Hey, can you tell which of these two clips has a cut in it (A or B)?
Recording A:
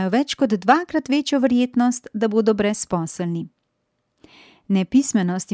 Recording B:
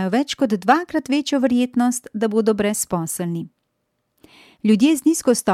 B